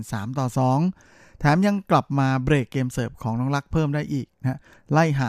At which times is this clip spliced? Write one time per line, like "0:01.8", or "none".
none